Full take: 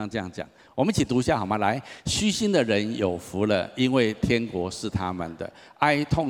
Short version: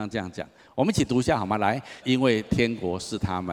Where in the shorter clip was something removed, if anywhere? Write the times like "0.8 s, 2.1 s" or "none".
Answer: 2.0 s